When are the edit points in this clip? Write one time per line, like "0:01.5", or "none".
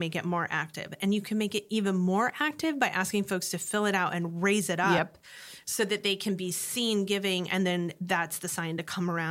none